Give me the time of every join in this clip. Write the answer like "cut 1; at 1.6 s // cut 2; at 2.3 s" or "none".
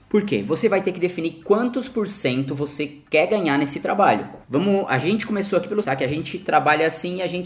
cut 1; at 4.4 s // cut 2; at 5.8 s